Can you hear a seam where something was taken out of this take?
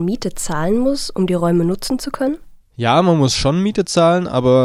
no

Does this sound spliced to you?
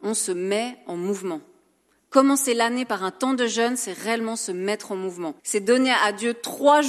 yes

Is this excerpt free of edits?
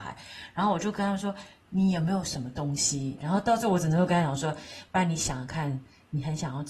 no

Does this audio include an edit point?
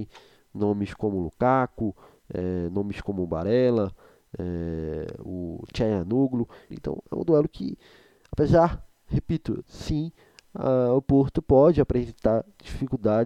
yes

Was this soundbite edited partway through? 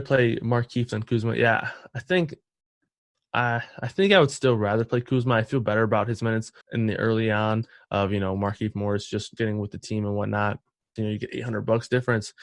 yes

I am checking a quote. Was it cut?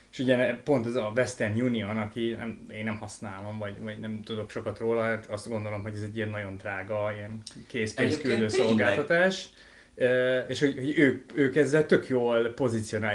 no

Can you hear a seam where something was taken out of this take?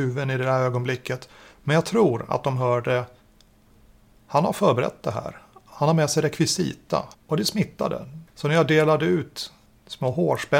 yes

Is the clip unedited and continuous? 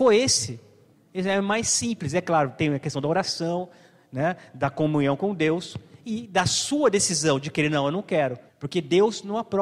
no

